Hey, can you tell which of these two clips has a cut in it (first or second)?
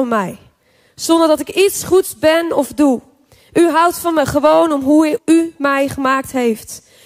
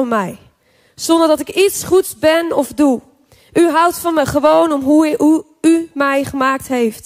first